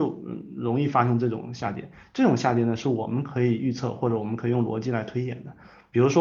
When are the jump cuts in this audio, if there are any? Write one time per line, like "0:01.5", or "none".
none